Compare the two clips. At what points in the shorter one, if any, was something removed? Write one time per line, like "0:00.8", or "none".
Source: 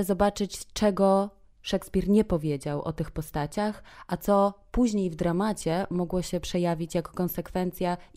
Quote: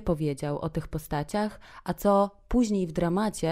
none

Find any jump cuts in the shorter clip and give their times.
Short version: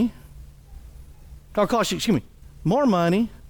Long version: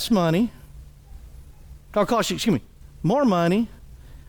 none

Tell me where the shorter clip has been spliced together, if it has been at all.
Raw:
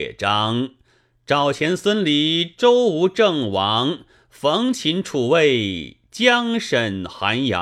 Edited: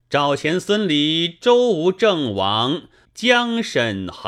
0:03.0

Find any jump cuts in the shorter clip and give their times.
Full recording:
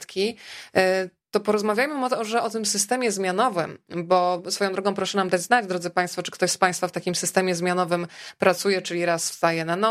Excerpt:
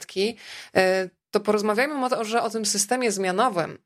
none

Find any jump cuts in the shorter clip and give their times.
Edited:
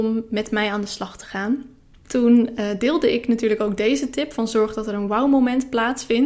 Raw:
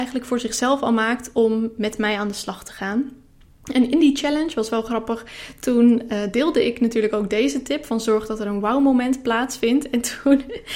0:02.0

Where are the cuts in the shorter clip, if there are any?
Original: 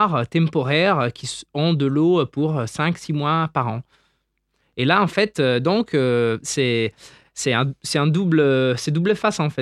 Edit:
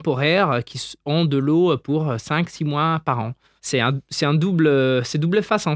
0:03.6

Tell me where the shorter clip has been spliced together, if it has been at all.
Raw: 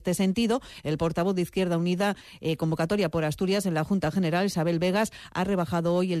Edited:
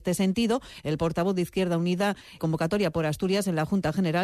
0:02.4

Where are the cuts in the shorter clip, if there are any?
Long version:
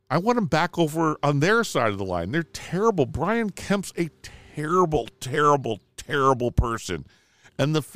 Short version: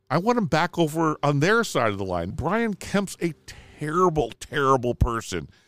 0:02.3
0:04.4

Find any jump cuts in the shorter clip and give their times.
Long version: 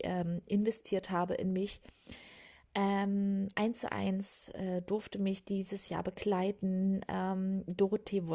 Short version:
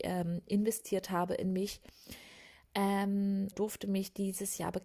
0:03.5

